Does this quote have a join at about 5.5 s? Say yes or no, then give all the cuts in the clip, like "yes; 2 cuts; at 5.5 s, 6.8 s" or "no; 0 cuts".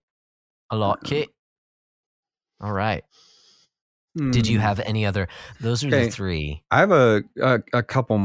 yes; 1 cut; at 5.5 s